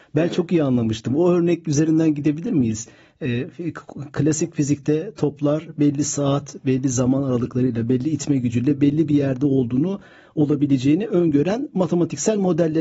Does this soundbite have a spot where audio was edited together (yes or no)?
no